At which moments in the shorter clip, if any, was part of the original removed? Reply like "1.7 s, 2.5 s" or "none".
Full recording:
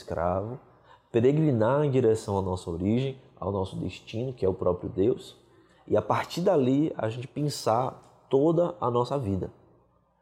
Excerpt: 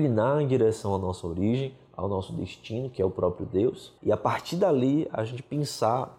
4.0 s